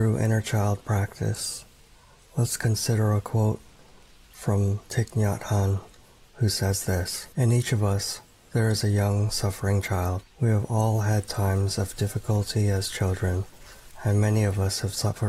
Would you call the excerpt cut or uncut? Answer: cut